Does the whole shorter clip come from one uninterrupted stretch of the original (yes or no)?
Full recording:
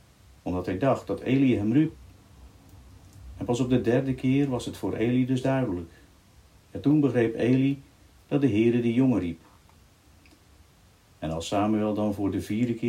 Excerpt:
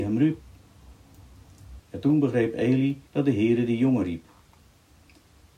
no